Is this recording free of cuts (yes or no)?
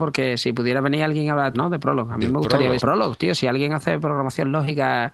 no